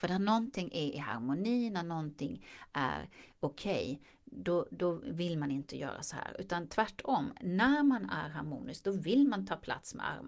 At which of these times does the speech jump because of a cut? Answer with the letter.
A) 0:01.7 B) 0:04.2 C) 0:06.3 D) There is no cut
D